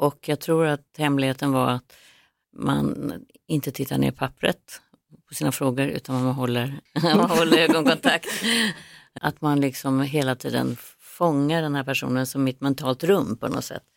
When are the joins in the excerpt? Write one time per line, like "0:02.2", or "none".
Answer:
0:06.9
0:09.2